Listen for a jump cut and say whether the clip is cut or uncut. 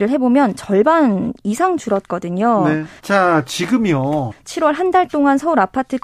cut